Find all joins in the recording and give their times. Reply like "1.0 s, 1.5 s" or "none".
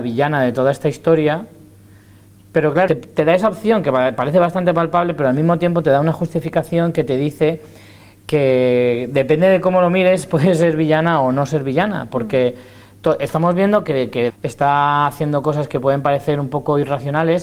2.9 s, 14.3 s